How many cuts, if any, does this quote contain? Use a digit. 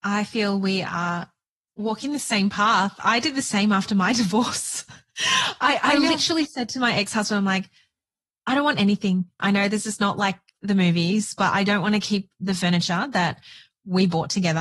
1